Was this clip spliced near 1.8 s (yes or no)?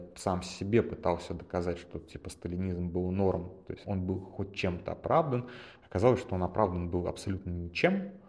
no